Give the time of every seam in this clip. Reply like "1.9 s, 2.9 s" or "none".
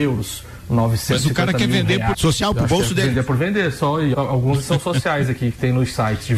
2.1 s, 4.1 s